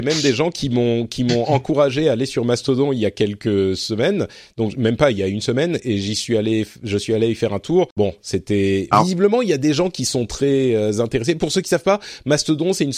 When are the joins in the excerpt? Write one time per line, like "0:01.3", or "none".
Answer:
0:07.9